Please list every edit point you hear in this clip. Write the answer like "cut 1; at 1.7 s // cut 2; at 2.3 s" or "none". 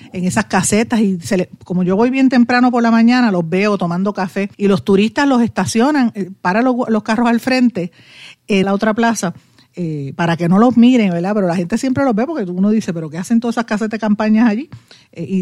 cut 1; at 4.5 s // cut 2; at 8.6 s